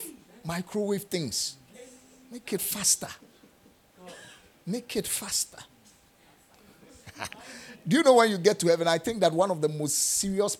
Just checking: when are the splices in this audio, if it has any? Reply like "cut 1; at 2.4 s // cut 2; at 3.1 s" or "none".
cut 1; at 6.5 s